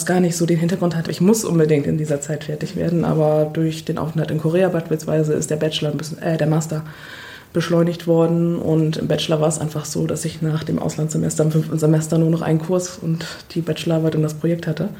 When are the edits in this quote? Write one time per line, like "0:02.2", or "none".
0:01.1